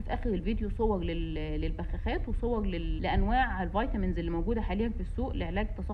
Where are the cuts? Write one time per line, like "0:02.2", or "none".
0:03.0